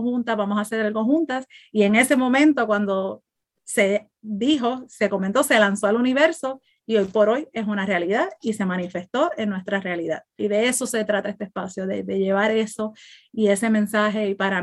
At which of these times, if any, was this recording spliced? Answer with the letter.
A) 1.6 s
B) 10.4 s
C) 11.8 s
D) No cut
B